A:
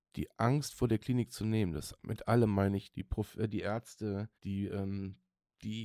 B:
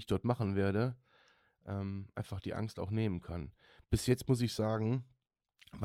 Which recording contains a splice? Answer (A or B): A